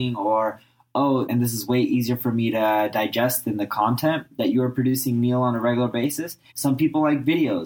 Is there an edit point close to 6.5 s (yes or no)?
yes